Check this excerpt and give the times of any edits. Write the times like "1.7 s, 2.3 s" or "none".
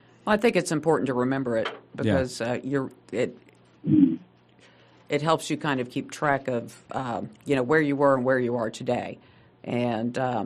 none